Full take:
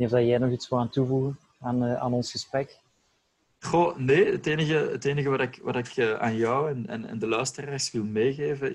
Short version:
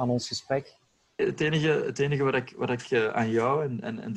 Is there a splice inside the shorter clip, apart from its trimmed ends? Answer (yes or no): yes